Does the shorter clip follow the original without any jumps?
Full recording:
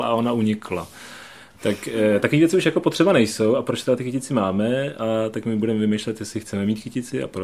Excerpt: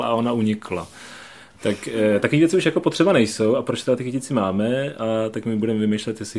yes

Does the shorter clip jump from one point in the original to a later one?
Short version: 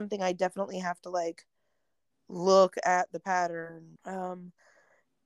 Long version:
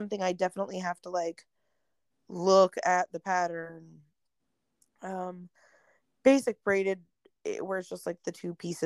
yes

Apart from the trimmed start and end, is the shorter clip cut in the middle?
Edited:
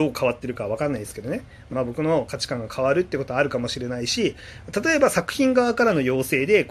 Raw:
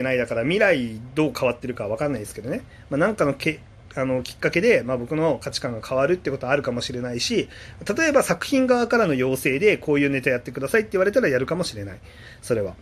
yes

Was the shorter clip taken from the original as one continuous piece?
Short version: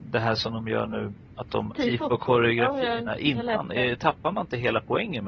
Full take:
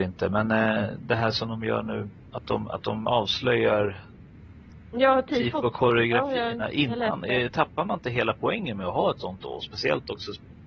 no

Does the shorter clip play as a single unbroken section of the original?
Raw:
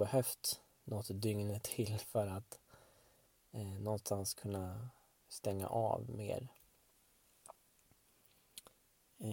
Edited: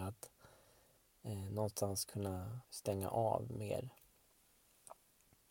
no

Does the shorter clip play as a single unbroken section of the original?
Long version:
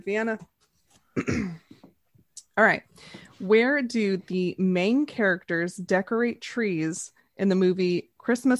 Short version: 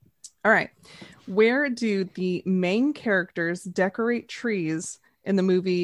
yes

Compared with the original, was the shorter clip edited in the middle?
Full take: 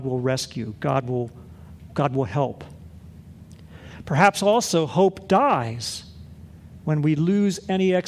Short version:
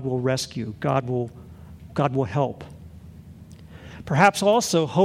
no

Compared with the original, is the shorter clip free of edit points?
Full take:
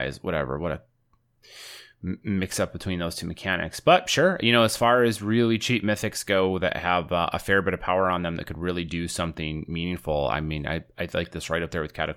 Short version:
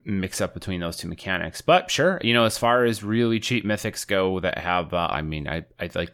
no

